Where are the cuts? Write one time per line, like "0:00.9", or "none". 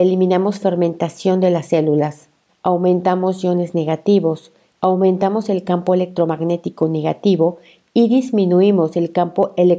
0:02.5
0:04.7